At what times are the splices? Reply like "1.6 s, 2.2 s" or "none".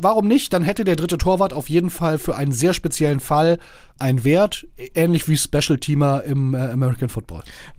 none